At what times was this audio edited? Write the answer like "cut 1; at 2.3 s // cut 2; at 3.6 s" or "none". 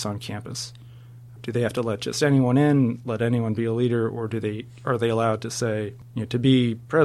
cut 1; at 1.4 s